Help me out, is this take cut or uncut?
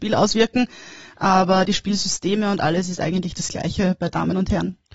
uncut